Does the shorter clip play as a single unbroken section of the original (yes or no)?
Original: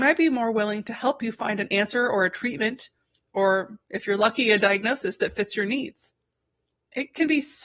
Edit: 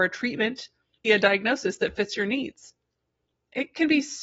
no